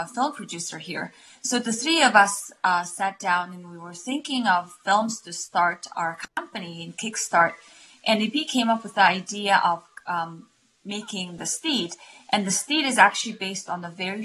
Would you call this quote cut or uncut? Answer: uncut